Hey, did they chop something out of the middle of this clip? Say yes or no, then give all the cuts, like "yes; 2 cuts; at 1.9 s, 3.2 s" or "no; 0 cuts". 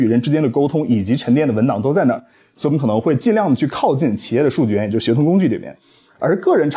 no; 0 cuts